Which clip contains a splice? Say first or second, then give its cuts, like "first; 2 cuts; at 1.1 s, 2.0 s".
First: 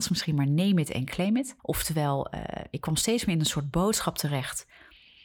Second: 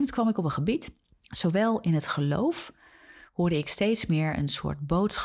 first; 1 cut; at 1.6 s